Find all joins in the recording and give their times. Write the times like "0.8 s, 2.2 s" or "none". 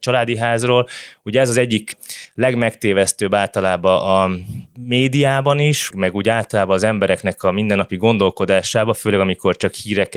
5.9 s